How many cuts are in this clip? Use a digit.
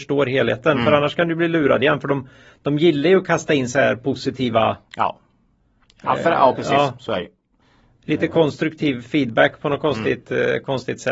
0